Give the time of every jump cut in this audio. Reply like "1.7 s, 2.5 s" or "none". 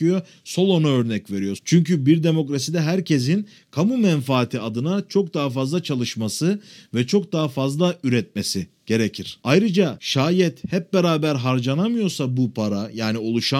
1.6 s